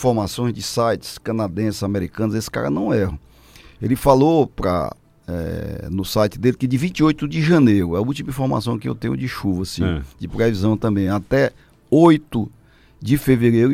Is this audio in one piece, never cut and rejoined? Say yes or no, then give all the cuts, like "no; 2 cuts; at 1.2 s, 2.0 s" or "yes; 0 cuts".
yes; 0 cuts